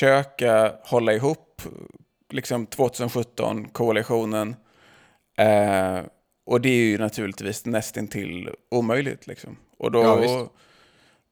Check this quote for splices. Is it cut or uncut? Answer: uncut